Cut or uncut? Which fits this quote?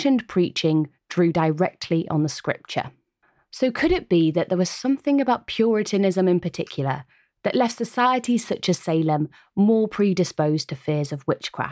uncut